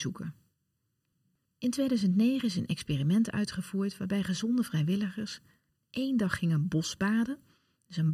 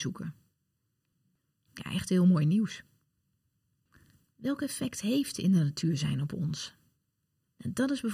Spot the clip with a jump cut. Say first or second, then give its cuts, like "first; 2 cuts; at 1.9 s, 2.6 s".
first; 1 cut; at 1.4 s